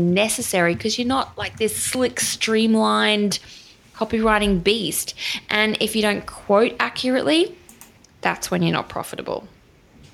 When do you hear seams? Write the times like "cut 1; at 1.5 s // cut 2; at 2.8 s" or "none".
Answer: none